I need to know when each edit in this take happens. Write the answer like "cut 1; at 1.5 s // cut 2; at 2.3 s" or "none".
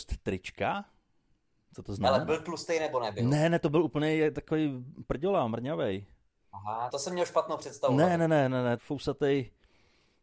cut 1; at 6.9 s // cut 2; at 8.8 s